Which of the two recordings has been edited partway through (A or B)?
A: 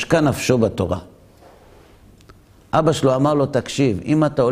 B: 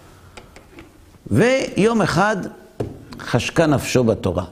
B